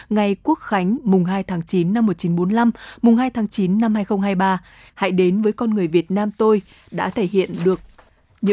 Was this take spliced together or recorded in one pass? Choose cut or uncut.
cut